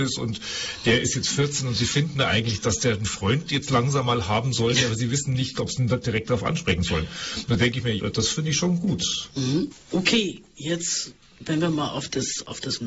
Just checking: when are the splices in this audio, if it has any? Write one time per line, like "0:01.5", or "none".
0:05.5
0:08.0